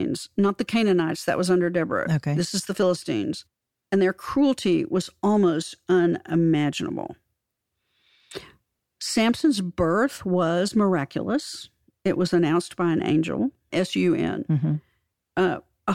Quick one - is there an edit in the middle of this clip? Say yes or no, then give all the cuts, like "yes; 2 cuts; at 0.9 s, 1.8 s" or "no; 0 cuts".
yes; 1 cut; at 13.7 s